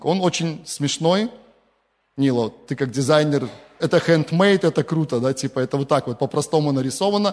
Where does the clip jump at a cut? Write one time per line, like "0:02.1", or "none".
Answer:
0:03.8